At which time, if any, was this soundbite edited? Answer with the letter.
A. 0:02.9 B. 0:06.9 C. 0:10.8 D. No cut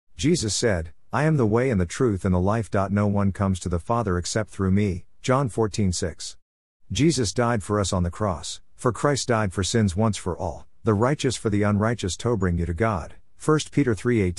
D